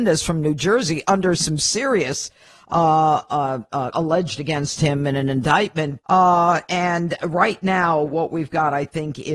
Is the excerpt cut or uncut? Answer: cut